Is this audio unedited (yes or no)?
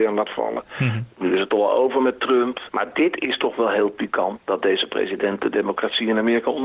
no